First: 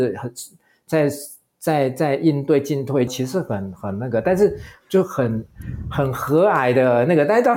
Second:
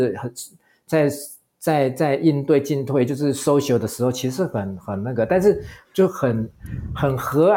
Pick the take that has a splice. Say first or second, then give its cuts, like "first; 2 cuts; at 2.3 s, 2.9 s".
first; 1 cut; at 3.1 s